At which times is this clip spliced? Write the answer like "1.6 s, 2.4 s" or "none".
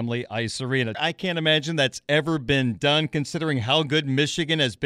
0.9 s